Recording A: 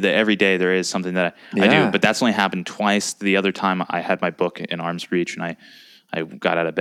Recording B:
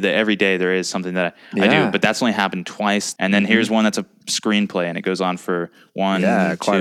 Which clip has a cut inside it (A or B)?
B